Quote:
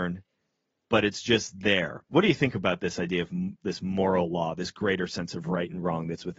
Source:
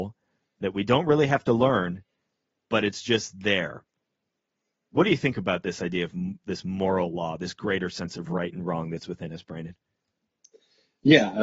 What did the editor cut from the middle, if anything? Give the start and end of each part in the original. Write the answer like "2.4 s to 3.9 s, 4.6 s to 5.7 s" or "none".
3.9 s to 4.9 s